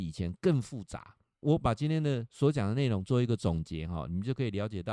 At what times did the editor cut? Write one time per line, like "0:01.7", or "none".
0:01.4